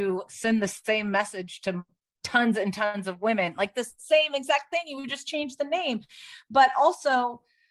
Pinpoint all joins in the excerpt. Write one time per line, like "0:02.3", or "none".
none